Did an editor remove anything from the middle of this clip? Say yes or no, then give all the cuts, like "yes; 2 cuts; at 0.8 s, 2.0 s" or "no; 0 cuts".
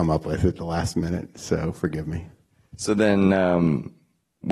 no; 0 cuts